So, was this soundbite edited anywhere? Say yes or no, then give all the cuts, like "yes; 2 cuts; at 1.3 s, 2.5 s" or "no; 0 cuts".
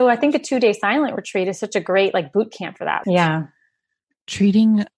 yes; 1 cut; at 3.0 s